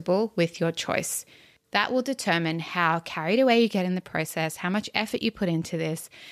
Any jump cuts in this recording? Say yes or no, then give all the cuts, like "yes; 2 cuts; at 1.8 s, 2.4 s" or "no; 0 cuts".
yes; 1 cut; at 1.6 s